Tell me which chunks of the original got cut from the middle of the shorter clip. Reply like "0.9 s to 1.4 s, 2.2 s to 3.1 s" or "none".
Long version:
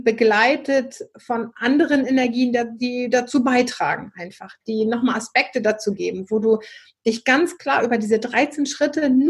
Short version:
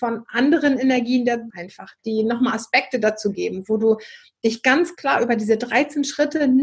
2.8 s to 4.1 s